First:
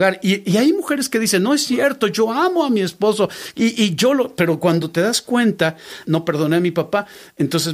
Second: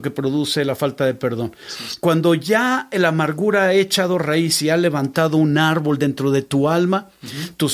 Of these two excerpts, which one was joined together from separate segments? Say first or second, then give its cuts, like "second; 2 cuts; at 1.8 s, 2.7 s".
first; 1 cut; at 6.0 s